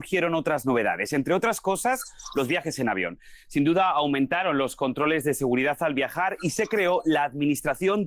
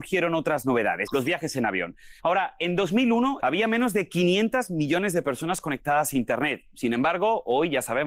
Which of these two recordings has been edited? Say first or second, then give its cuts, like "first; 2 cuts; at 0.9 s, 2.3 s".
second; 3 cuts; at 1.1 s, 2.2 s, 3.4 s